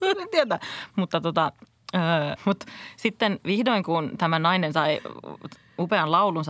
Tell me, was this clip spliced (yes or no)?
yes